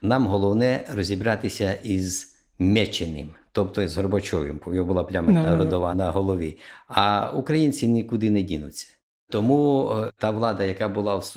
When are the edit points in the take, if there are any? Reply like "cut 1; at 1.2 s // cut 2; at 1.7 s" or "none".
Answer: none